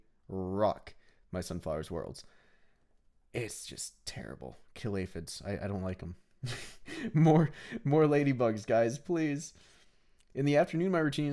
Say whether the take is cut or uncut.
uncut